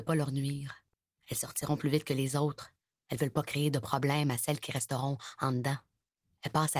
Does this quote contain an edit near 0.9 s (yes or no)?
no